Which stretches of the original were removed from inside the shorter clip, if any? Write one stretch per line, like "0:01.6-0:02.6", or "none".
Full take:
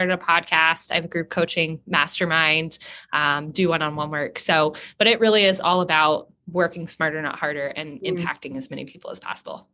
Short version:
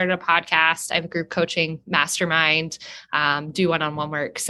none